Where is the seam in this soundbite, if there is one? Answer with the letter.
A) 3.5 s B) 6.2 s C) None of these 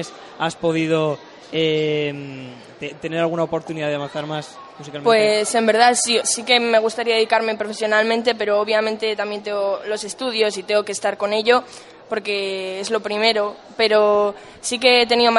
B